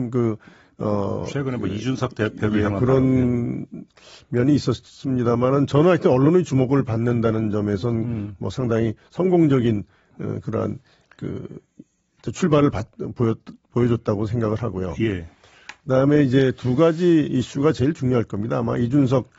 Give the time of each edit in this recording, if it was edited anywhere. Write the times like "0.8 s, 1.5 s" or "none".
none